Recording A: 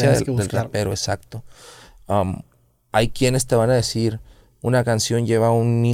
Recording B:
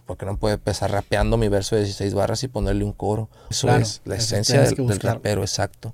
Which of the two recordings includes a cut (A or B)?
B